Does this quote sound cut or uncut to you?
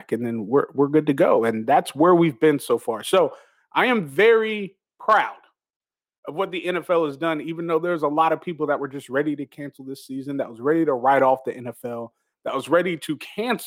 uncut